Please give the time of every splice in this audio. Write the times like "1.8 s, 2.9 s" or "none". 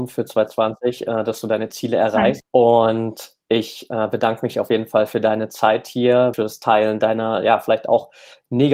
2.4 s, 6.3 s